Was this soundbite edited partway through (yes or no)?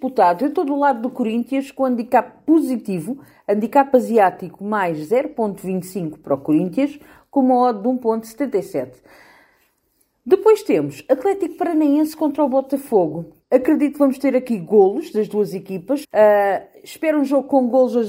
yes